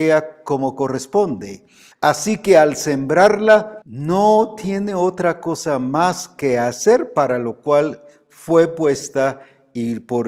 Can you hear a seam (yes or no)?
yes